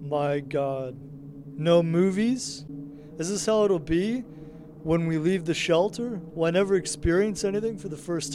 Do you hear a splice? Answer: yes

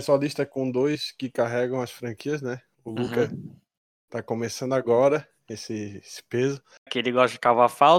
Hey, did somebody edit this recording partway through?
yes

